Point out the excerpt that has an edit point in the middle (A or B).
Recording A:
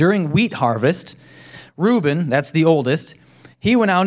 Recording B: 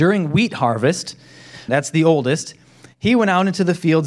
B